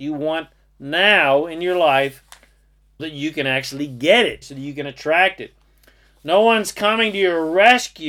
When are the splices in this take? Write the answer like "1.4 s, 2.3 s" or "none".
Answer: 3.0 s, 4.4 s